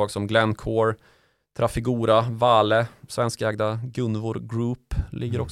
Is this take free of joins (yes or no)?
yes